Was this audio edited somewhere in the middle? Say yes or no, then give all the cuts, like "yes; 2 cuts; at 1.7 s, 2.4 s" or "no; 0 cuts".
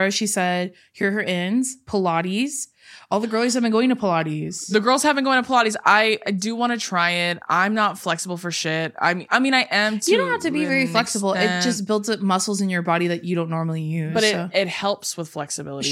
no; 0 cuts